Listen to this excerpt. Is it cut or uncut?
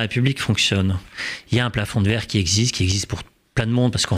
cut